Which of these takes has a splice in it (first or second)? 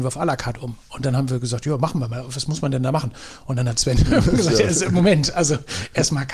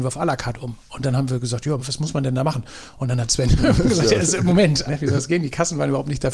second